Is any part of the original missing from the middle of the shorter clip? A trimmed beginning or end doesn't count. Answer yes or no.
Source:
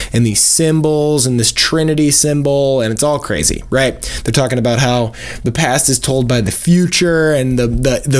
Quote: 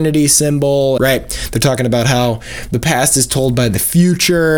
yes